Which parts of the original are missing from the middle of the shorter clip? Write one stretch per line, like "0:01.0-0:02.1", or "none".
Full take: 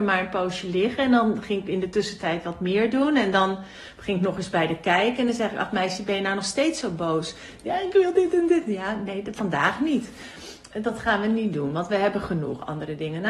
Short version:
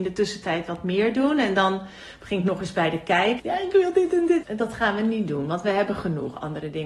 0:05.2-0:07.6
0:08.6-0:10.7